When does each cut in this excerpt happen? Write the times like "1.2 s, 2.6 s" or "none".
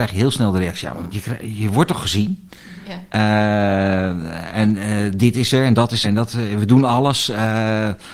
1.1 s, 6.0 s